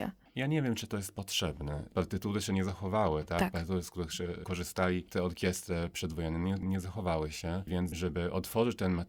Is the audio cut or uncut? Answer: uncut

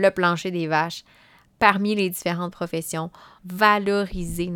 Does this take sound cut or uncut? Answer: cut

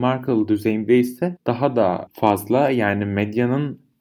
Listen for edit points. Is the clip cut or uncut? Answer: uncut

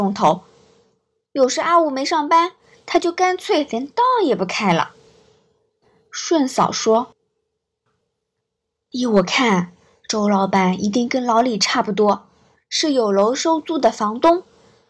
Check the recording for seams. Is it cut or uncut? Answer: uncut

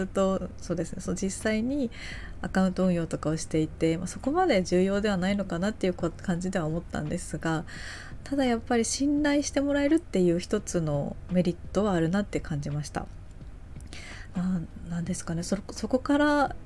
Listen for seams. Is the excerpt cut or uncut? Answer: cut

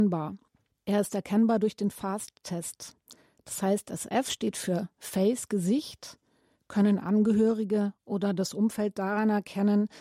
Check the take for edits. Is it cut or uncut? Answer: uncut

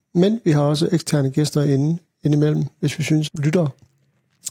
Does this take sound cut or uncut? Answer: cut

